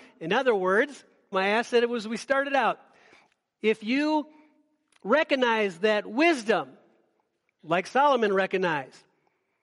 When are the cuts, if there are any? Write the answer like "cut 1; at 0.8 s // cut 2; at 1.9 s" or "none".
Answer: cut 1; at 1.3 s